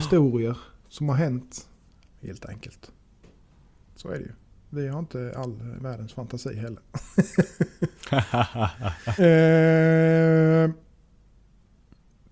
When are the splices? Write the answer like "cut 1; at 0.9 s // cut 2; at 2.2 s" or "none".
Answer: cut 1; at 2.1 s // cut 2; at 9.2 s